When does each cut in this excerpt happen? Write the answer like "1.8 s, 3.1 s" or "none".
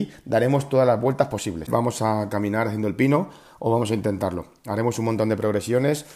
1.7 s